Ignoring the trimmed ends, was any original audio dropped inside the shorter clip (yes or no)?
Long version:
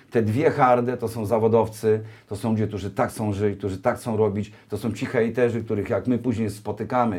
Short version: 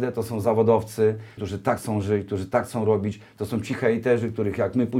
yes